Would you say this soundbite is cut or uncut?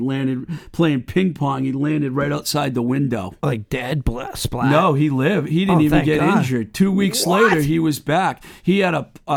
uncut